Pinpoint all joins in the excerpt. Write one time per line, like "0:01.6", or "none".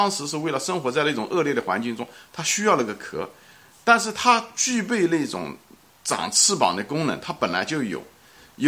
none